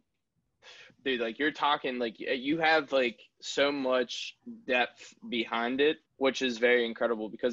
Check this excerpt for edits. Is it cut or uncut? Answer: cut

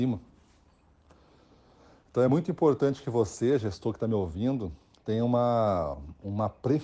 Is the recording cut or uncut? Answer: uncut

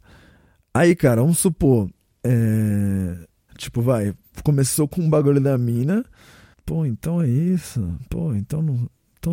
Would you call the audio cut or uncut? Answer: cut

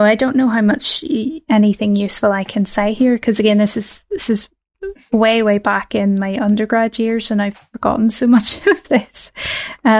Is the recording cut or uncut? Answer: uncut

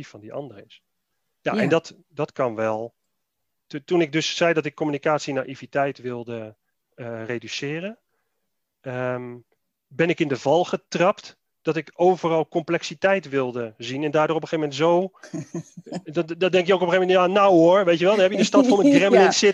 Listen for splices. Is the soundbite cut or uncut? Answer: uncut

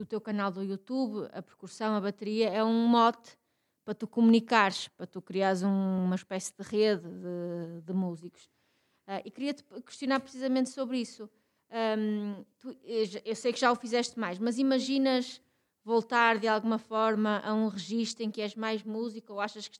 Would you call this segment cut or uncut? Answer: uncut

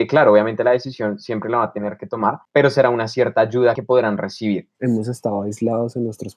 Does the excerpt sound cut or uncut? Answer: cut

